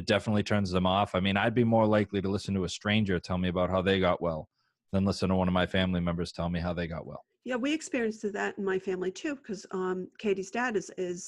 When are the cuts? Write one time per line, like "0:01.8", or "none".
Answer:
none